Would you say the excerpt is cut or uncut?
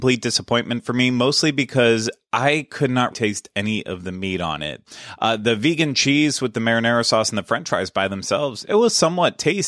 cut